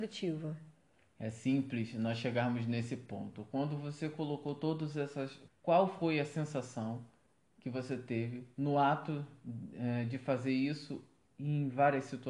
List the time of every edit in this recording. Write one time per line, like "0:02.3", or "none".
0:05.5